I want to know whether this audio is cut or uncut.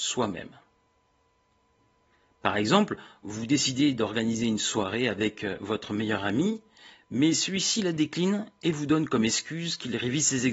uncut